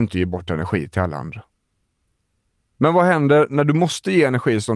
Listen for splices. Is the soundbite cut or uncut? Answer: uncut